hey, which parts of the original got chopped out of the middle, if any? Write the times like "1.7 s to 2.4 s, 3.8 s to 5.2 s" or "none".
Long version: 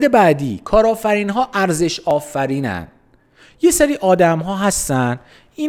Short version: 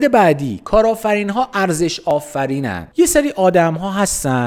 2.9 s to 3.6 s